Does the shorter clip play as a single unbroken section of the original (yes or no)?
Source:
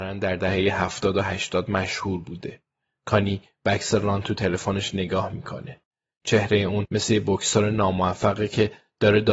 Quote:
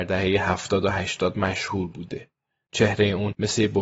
no